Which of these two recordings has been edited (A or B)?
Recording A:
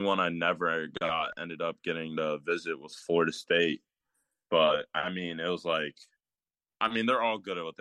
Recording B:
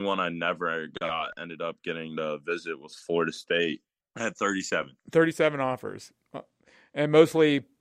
B